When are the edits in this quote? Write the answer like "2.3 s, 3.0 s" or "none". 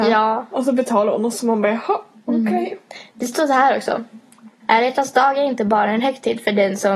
2.1 s, 4.6 s